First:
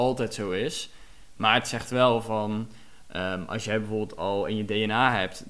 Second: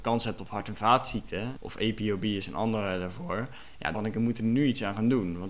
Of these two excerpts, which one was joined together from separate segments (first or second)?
second